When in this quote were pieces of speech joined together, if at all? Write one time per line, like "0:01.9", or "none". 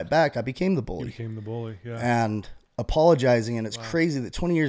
none